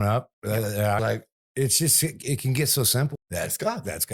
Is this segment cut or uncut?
cut